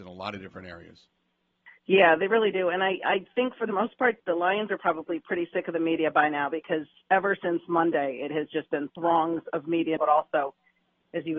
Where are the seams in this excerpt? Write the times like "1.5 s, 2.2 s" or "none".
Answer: 4.2 s, 10.0 s